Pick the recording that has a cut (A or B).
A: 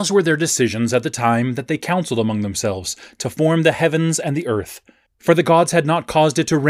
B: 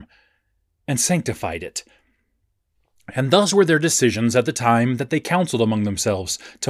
A